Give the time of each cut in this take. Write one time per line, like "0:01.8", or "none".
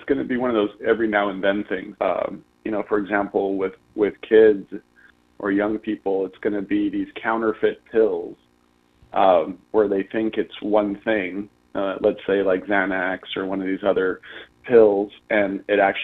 0:02.0